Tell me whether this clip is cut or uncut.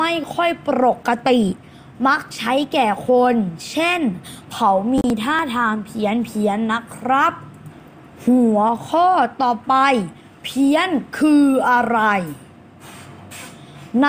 uncut